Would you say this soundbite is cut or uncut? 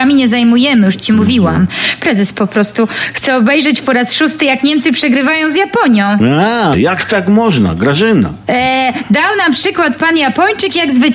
cut